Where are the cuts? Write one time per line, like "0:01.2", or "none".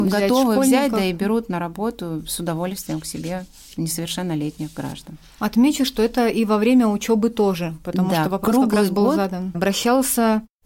0:09.5